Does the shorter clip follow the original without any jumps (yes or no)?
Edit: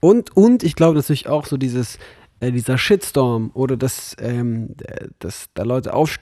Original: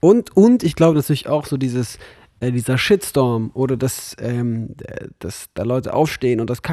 yes